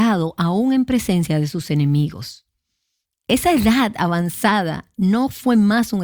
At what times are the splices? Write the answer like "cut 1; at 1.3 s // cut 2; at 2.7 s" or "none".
none